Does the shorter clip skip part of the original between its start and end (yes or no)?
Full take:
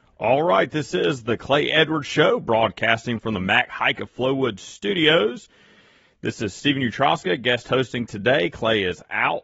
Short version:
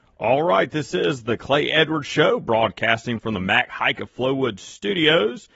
no